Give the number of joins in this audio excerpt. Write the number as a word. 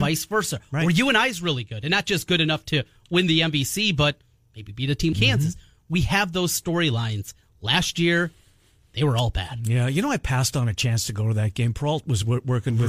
one